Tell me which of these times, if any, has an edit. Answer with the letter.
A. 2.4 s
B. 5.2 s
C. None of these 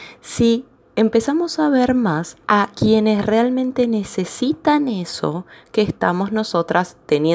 A